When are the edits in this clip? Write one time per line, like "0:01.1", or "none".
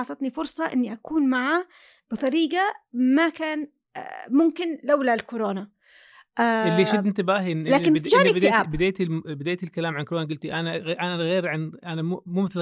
none